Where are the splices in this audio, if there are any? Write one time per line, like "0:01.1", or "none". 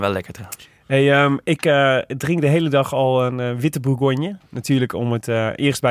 none